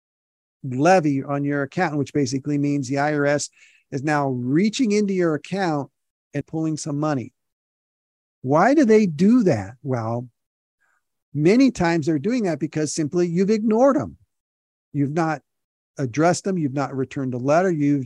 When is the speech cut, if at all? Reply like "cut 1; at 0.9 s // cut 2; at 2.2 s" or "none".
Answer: cut 1; at 6.4 s